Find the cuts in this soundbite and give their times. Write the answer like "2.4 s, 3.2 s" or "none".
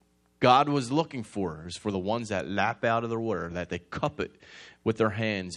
none